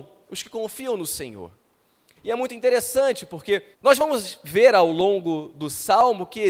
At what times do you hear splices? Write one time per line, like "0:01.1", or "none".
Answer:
0:02.2
0:03.7

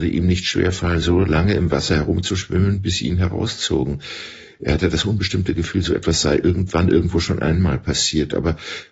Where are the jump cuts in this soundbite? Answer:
none

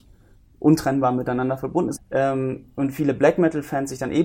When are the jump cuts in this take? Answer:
0:02.0

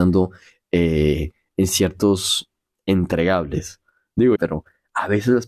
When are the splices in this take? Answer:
0:04.4

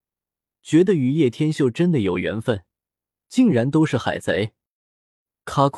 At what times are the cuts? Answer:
none

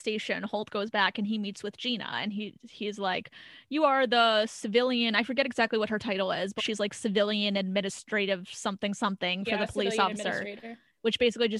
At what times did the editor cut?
0:06.6

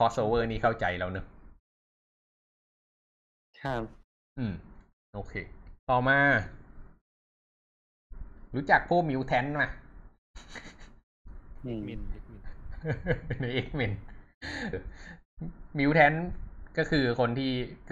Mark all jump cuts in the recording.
0:05.8
0:14.7

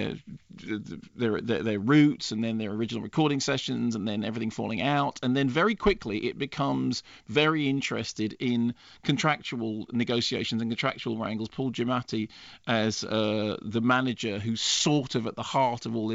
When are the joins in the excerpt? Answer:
none

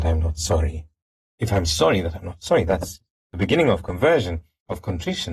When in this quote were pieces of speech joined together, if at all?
0:01.2

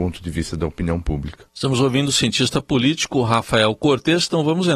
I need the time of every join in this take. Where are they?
none

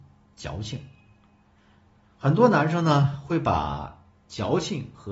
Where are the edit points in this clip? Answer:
none

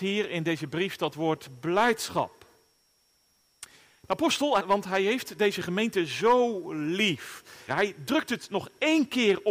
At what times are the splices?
0:04.6
0:07.7

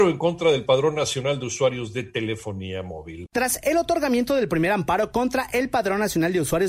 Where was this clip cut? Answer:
0:03.3

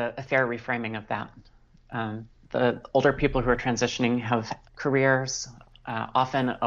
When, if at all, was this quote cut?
0:02.4
0:04.7

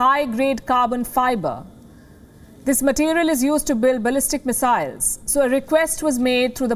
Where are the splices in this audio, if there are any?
none

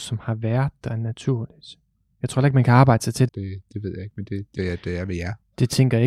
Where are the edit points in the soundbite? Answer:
0:03.3
0:04.6

